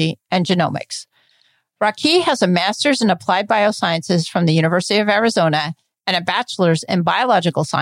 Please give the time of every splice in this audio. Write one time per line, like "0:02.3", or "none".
none